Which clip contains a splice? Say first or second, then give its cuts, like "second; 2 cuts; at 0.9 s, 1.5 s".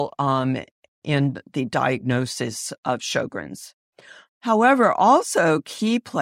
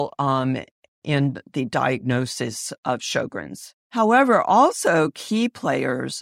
second; 1 cut; at 3.8 s